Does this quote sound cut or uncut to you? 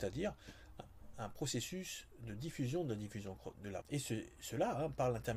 cut